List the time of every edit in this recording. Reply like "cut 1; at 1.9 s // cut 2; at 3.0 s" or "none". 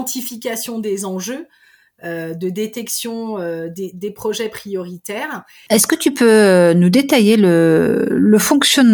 cut 1; at 5.7 s